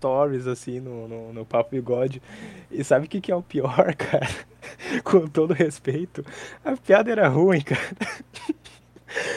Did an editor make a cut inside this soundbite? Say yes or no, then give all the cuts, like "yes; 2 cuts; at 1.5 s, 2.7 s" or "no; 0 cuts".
no; 0 cuts